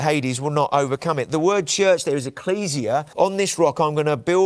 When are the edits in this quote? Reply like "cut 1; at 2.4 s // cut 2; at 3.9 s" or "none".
cut 1; at 3.1 s